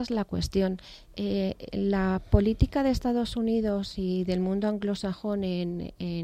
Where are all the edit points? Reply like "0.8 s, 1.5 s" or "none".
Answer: none